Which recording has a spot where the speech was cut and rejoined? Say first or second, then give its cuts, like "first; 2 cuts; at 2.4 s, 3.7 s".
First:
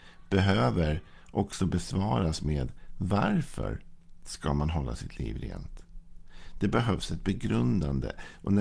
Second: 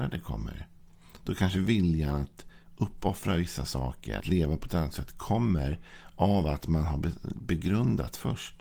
second; 1 cut; at 4.2 s